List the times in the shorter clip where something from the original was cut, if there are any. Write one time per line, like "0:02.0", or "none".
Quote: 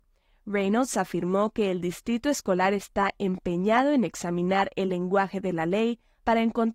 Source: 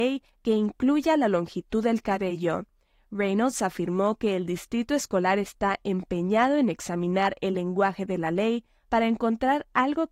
none